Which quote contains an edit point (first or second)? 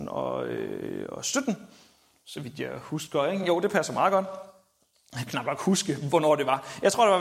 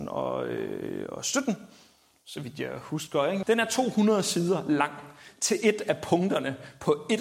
second